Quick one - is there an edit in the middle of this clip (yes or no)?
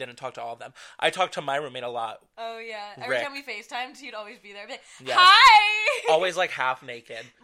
no